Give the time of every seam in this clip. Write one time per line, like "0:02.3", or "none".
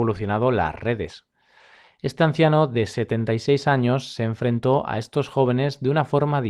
none